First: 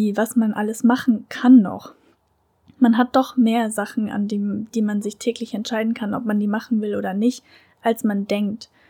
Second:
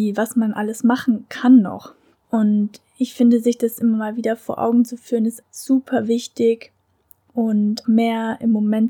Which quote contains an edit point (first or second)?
second